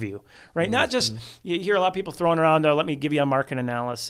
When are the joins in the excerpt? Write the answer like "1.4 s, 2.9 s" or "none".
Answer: none